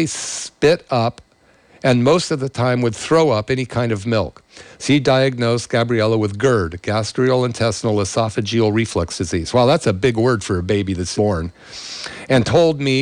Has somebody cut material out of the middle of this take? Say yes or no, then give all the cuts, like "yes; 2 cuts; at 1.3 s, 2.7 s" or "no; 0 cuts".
yes; 2 cuts; at 4.8 s, 11.1 s